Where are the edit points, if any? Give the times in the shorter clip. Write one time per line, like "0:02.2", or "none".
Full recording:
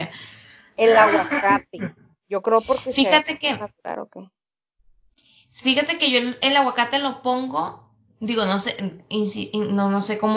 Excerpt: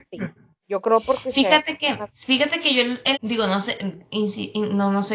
0:02.1
0:03.1